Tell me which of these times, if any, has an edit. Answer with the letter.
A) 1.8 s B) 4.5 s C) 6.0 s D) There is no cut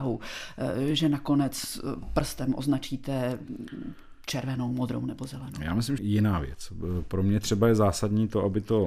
C